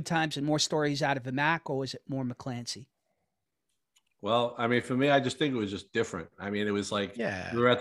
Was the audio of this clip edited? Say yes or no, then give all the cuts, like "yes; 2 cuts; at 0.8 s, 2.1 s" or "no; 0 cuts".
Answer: no; 0 cuts